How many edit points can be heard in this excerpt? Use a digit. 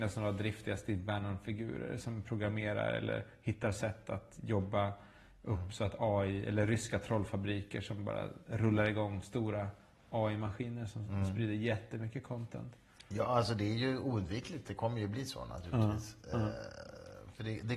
0